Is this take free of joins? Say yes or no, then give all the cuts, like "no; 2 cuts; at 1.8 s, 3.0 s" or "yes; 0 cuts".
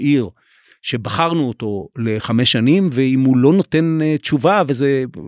yes; 0 cuts